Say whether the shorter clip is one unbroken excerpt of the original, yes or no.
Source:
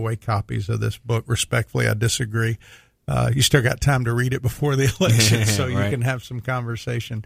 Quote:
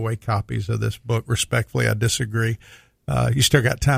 yes